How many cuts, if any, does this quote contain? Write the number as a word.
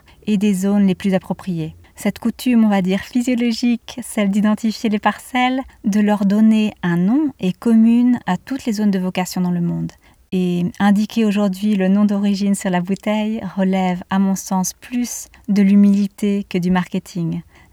zero